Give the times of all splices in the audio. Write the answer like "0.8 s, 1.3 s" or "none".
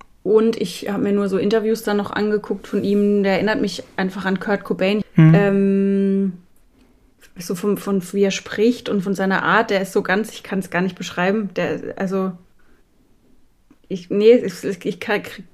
5.0 s